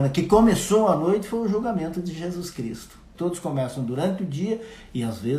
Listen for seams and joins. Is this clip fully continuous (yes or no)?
no